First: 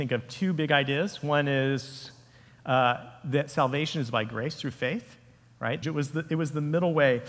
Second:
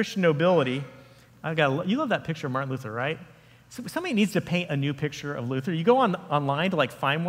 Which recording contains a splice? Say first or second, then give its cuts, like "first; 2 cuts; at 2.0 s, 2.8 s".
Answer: first; 1 cut; at 5.8 s